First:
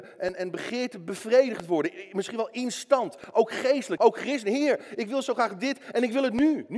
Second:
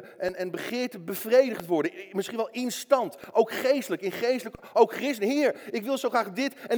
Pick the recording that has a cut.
first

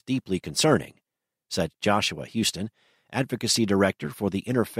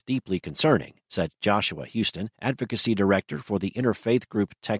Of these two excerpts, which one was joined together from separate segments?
second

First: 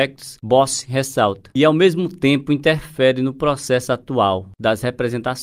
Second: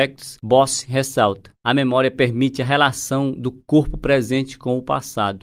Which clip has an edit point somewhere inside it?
first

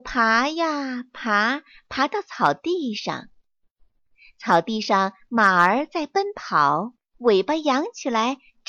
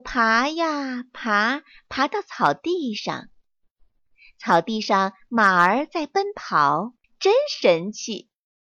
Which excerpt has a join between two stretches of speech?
second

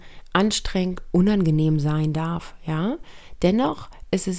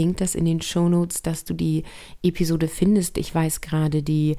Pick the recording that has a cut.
first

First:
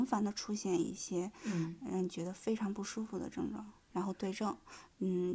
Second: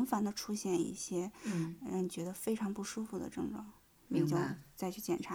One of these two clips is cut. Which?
first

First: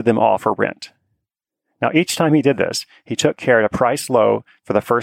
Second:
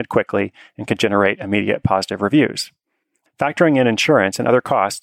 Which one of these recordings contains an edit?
second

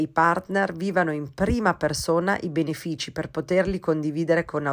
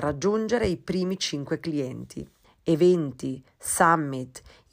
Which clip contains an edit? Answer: second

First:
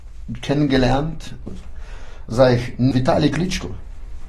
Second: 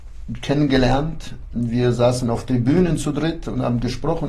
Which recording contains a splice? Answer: first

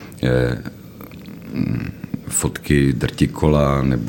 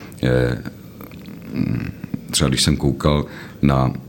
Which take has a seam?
first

